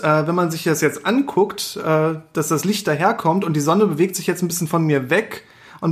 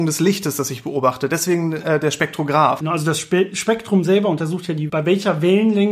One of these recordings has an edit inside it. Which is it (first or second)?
second